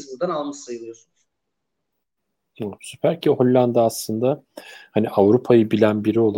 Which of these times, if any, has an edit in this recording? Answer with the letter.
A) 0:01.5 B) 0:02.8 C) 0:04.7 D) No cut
B